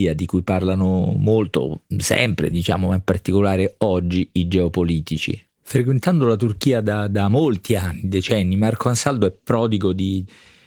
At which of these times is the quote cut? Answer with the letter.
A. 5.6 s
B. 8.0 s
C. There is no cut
A